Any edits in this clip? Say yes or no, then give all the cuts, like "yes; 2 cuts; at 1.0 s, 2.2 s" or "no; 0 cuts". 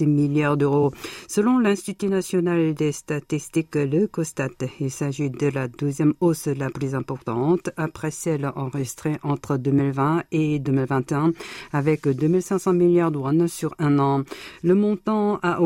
no; 0 cuts